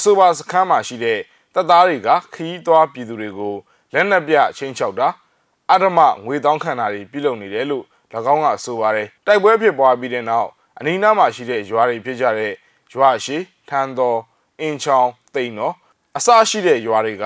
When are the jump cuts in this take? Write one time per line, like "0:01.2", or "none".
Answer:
0:09.2